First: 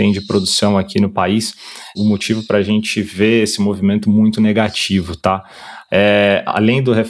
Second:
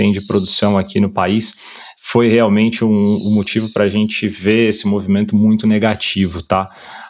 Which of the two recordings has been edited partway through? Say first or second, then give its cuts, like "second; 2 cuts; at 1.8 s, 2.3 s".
first; 2 cuts; at 2.0 s, 5.9 s